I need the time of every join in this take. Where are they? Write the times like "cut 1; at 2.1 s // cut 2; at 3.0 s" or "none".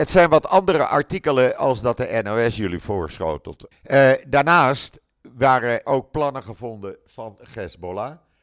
cut 1; at 3.7 s // cut 2; at 5.8 s